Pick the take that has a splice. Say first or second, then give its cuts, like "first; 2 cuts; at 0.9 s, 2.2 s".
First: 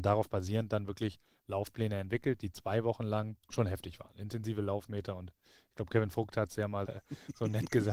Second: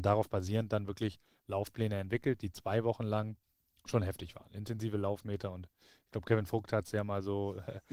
first; 2 cuts; at 3.4 s, 6.9 s